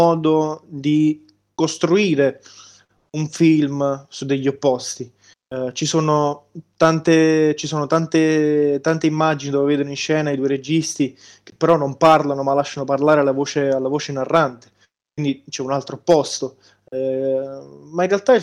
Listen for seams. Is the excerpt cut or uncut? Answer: uncut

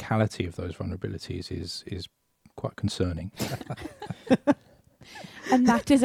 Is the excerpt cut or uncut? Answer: cut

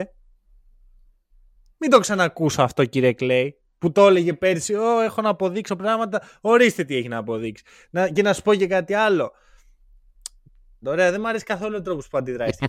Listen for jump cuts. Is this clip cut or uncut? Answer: cut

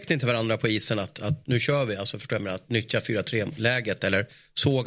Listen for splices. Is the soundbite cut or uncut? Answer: uncut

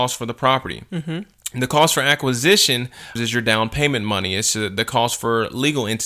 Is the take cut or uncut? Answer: cut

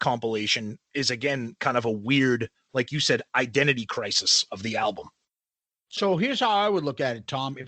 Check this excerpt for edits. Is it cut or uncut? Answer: uncut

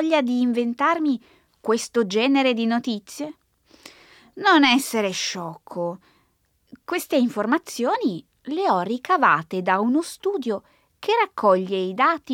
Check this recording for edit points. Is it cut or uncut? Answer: uncut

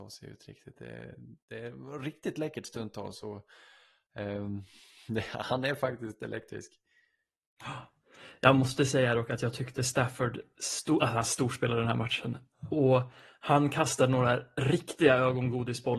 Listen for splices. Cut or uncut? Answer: uncut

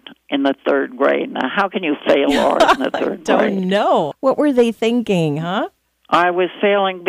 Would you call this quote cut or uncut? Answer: cut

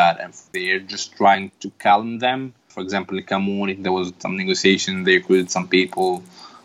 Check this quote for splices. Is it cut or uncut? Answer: uncut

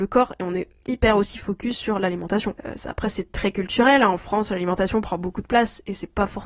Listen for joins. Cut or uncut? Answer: uncut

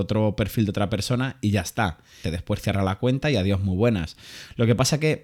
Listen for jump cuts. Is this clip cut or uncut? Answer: cut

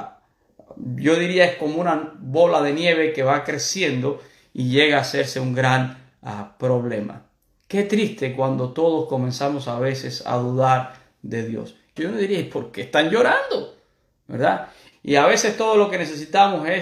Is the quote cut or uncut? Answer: cut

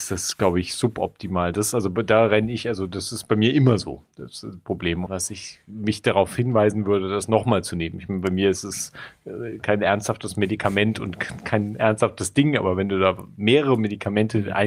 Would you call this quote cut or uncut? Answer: cut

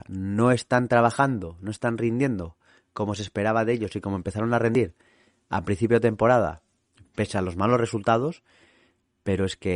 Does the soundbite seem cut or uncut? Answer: uncut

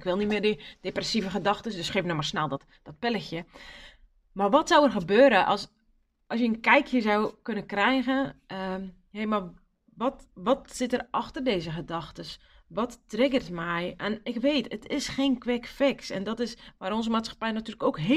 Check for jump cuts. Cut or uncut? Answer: uncut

